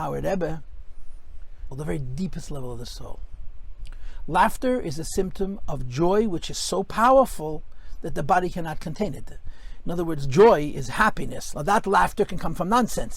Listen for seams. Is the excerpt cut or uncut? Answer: cut